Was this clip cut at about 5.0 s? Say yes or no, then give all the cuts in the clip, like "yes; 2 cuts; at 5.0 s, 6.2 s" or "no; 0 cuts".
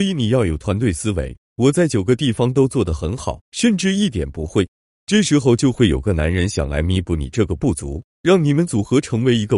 no; 1 cut; at 3.4 s